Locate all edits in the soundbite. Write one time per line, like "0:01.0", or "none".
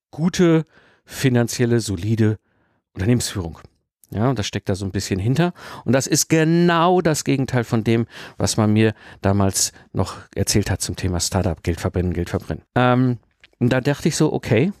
0:12.7